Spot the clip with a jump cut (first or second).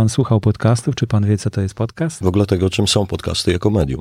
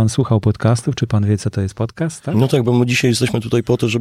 first